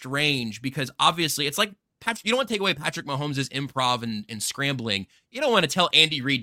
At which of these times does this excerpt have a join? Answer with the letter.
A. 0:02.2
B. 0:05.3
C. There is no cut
C